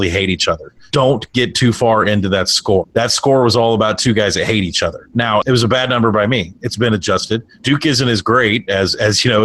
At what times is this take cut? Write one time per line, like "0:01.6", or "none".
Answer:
0:05.4